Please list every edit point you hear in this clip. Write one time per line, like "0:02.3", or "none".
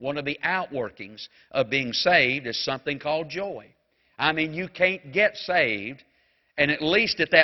none